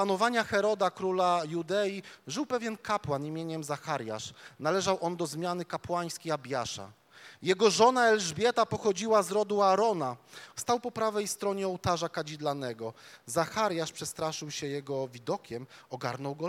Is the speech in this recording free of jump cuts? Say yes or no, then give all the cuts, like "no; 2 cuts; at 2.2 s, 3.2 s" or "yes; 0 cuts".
no; 1 cut; at 10.5 s